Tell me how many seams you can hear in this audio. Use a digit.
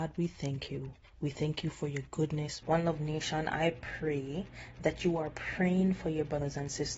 1